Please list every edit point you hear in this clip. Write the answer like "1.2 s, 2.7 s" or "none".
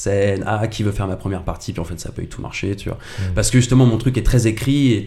none